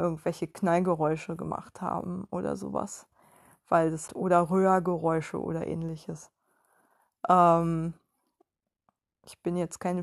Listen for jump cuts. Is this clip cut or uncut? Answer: cut